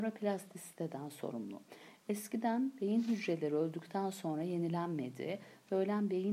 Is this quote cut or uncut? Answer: uncut